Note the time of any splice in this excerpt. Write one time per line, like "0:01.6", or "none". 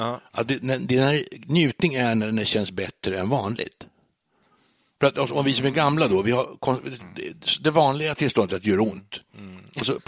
none